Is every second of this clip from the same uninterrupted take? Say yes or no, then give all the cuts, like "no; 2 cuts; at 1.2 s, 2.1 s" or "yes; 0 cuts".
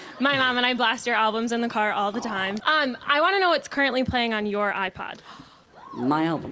no; 1 cut; at 2.6 s